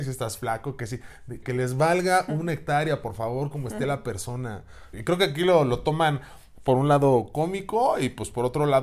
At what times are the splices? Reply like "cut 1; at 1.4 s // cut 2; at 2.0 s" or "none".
cut 1; at 1.4 s // cut 2; at 4.9 s